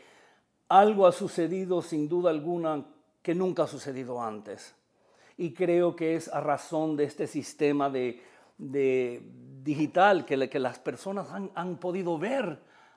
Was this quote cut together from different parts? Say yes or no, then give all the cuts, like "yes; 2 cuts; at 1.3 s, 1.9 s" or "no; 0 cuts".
no; 0 cuts